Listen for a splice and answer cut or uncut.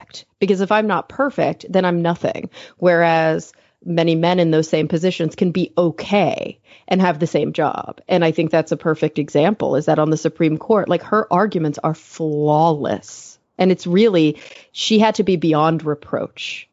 uncut